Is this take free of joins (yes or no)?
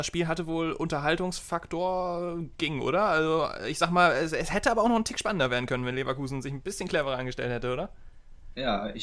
yes